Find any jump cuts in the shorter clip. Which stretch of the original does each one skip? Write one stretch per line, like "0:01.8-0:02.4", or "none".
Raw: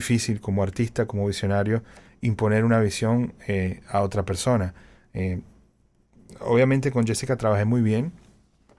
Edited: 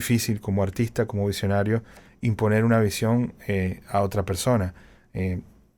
none